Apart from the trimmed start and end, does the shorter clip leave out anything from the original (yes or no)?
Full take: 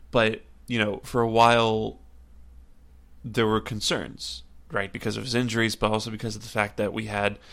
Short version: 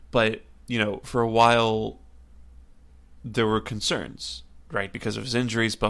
no